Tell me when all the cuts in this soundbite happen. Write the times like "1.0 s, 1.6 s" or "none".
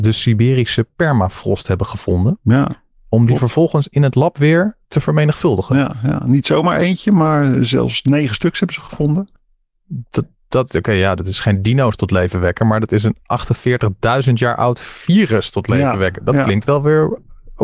none